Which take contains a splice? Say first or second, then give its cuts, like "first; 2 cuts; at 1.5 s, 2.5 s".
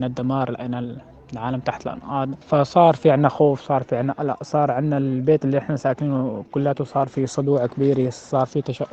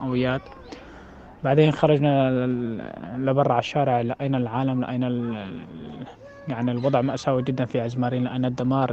first; 1 cut; at 2.4 s